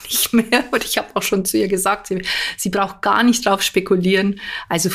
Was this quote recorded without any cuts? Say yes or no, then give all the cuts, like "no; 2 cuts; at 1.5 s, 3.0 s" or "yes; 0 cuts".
yes; 0 cuts